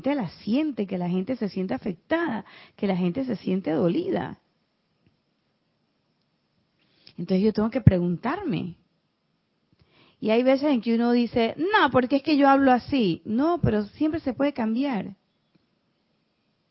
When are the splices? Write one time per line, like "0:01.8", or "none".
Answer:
none